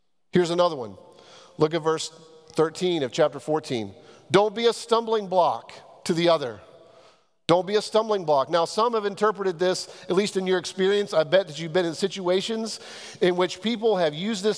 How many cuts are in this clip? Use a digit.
0